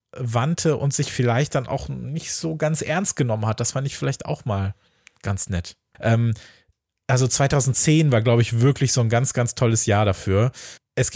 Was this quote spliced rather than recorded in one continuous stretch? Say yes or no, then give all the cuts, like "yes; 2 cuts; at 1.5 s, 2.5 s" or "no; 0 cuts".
yes; 1 cut; at 5.9 s